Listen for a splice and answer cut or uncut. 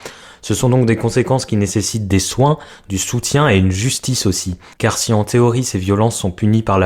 uncut